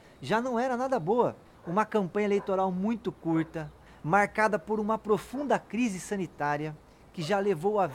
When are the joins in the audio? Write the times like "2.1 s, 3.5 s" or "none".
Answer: 1.6 s